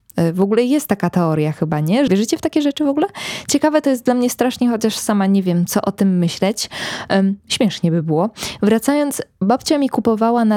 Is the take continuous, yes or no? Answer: no